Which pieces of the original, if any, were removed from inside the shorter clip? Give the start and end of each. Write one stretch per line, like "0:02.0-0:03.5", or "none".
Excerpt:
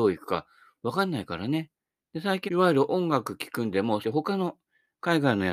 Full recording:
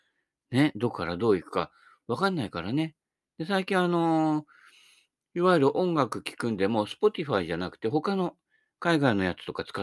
0:03.7-0:05.3
0:06.9-0:07.8